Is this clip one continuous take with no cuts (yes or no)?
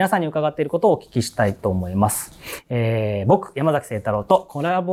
yes